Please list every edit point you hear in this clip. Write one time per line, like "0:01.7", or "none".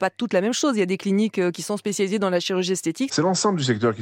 0:03.1